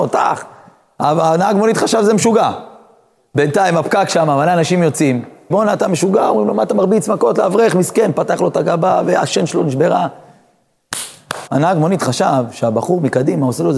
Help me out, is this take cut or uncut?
cut